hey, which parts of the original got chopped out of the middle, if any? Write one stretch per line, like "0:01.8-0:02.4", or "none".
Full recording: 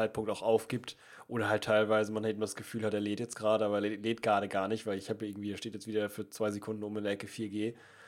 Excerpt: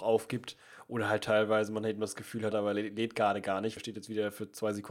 0:02.9-0:03.6
0:04.8-0:05.5